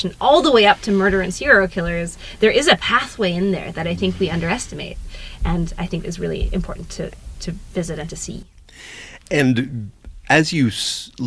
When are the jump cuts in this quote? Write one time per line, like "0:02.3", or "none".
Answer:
none